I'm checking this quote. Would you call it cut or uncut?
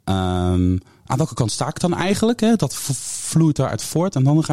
uncut